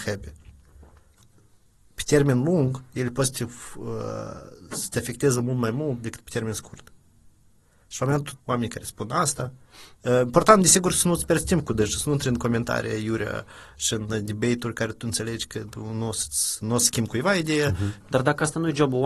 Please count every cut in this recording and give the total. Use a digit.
2